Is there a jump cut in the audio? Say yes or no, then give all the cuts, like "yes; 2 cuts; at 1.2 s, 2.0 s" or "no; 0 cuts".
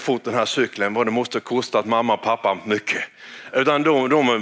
no; 0 cuts